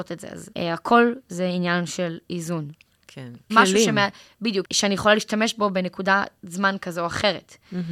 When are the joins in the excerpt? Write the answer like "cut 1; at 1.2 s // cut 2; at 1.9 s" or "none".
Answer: cut 1; at 3.5 s // cut 2; at 4.6 s

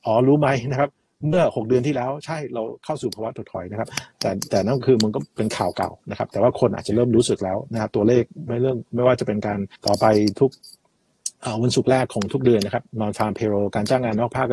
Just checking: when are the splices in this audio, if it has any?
cut 1; at 9.8 s

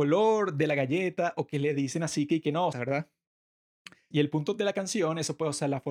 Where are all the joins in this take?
cut 1; at 2.7 s // cut 2; at 4.1 s

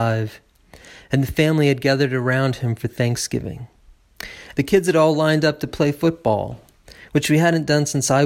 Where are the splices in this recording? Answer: cut 1; at 4.5 s

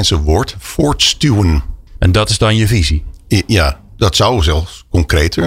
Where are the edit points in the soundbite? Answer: cut 1; at 1.9 s // cut 2; at 3.9 s

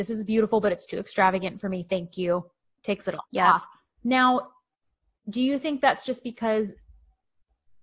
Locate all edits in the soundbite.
none

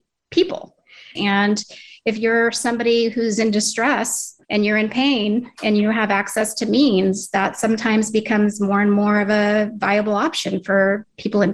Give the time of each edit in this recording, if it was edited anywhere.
cut 1; at 1.2 s // cut 2; at 4.4 s

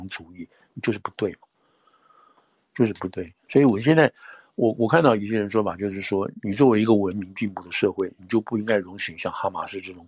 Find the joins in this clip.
cut 1; at 3.5 s

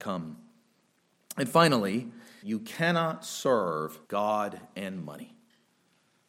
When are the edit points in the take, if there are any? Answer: cut 1; at 2.4 s // cut 2; at 4.0 s

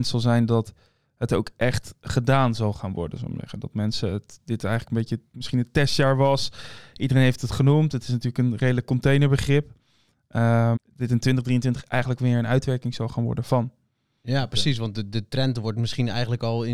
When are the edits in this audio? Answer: cut 1; at 10.8 s

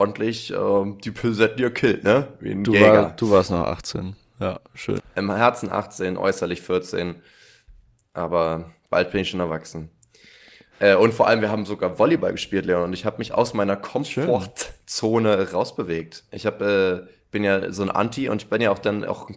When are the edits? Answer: cut 1; at 5.0 s

